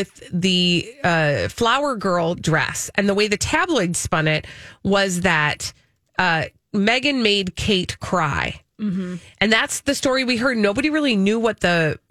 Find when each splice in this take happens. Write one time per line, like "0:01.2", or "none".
none